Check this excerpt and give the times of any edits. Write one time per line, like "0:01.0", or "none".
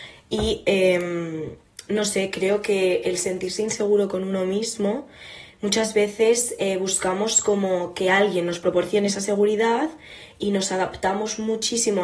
none